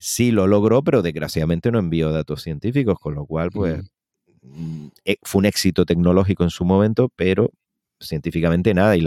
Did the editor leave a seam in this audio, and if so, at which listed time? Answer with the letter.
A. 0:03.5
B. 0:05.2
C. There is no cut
C